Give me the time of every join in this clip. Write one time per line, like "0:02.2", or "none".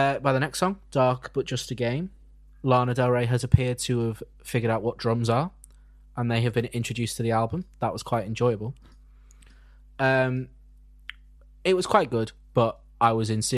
none